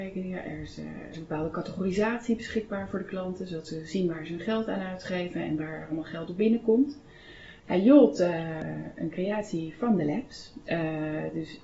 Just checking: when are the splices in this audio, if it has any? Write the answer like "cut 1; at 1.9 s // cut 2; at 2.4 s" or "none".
cut 1; at 1.1 s // cut 2; at 7.6 s